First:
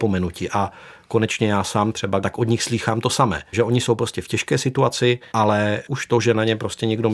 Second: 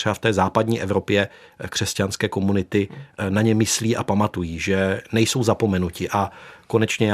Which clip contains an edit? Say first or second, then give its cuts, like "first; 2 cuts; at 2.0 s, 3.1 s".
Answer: first; 2 cuts; at 2.2 s, 5.3 s